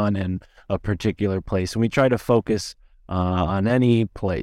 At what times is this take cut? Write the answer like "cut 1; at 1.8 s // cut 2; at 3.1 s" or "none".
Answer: none